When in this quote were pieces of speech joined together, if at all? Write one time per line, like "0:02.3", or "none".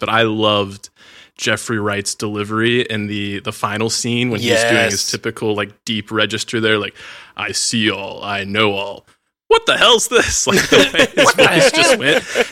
none

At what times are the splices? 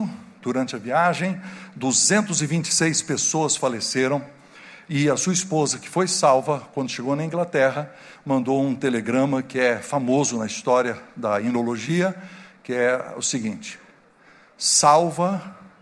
none

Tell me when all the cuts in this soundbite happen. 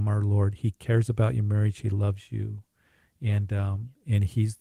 none

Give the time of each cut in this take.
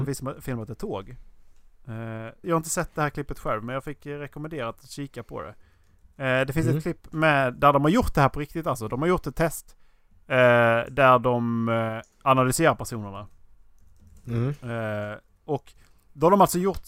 0:02.4

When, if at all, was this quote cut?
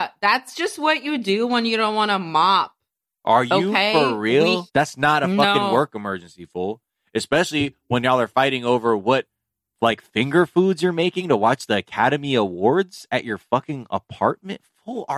0:04.7

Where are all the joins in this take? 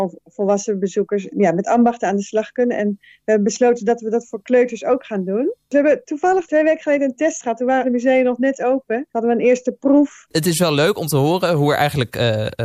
0:09.1
0:10.3

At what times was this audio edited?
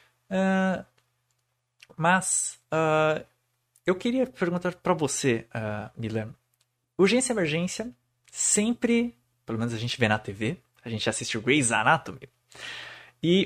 none

